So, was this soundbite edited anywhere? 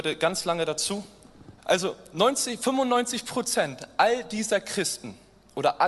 yes; 1 cut; at 1.6 s

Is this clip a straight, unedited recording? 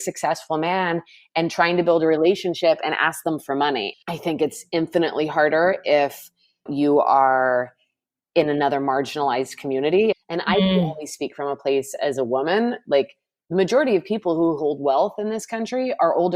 no; 2 cuts; at 3.9 s, 10.1 s

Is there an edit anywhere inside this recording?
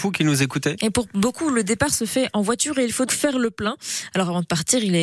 yes; 1 cut; at 3.1 s

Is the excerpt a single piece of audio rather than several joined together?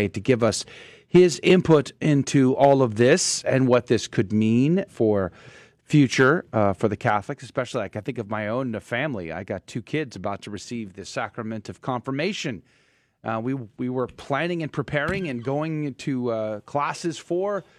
no; 1 cut; at 4.9 s

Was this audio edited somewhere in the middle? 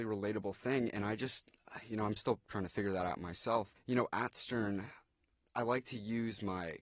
yes; 1 cut; at 3.8 s

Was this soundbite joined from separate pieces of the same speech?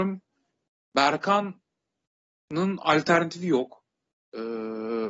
yes; 1 cut; at 4.1 s

